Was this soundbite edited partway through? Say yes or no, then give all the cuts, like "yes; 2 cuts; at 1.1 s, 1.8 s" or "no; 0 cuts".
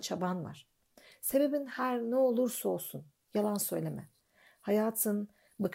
no; 0 cuts